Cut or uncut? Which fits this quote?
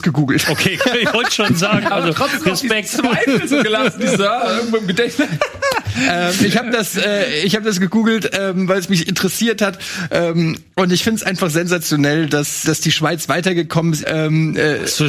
cut